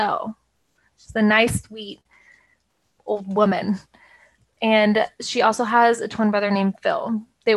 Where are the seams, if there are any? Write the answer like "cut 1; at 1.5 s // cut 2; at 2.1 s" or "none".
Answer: cut 1; at 0.9 s